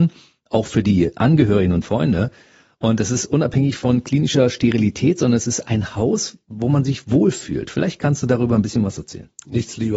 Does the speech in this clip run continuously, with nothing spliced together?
yes; 0 cuts

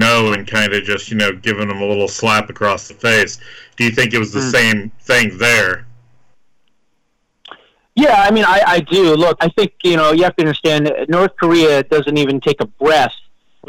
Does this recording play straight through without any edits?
no; 1 cut; at 9.4 s

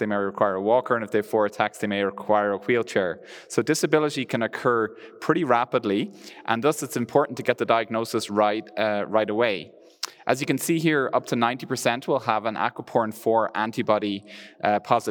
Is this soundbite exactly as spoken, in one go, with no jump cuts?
yes; 0 cuts

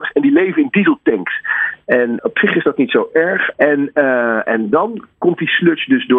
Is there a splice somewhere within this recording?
yes; 2 cuts; at 2.2 s, 3.5 s

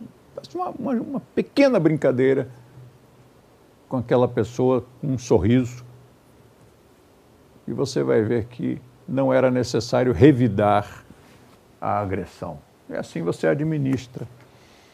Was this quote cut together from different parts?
no; 0 cuts

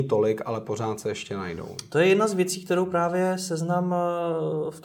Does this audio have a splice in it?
no; 0 cuts

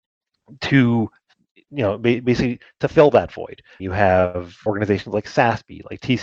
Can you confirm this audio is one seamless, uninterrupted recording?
yes; 0 cuts

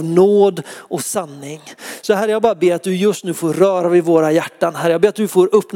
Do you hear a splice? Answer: no; 0 cuts

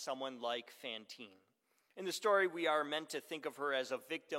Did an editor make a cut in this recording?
no; 0 cuts

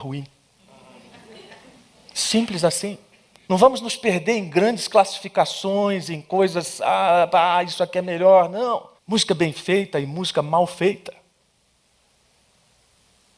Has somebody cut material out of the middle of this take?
yes; 2 cuts; at 3.4 s, 9.0 s

